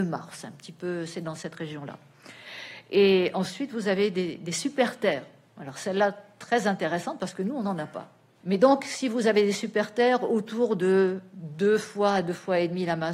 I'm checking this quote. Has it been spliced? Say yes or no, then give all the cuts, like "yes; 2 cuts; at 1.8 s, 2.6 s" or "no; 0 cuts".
yes; 1 cut; at 8.4 s